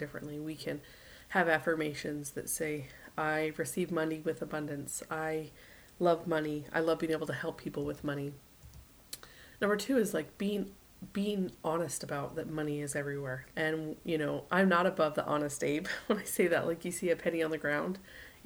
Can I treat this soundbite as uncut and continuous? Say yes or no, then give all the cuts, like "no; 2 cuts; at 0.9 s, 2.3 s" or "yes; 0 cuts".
no; 1 cut; at 13.5 s